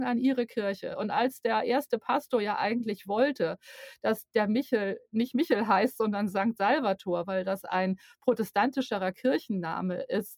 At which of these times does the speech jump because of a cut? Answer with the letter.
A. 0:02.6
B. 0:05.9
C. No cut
C